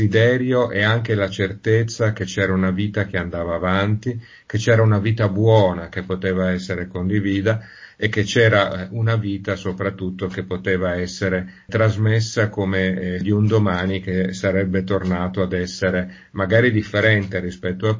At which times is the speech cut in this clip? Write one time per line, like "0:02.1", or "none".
0:11.7
0:13.2